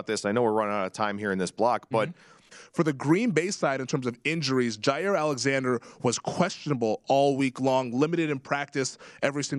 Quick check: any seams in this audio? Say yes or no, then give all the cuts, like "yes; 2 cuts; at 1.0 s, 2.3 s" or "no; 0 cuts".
yes; 1 cut; at 2.5 s